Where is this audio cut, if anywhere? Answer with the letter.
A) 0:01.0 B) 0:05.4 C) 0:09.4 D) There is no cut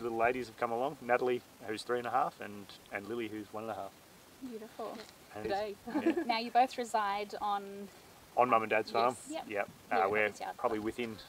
B